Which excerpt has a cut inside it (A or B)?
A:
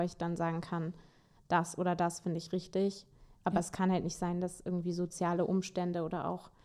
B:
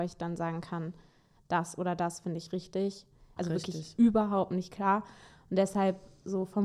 B